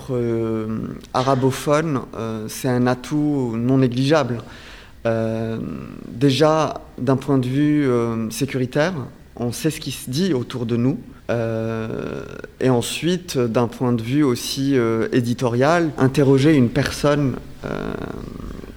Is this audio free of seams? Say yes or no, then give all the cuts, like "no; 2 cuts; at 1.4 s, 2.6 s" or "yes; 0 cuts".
no; 2 cuts; at 11.2 s, 16.0 s